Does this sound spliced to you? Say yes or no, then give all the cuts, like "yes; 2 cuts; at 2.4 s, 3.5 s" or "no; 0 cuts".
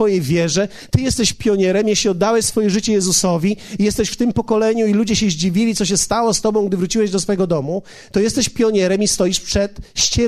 no; 0 cuts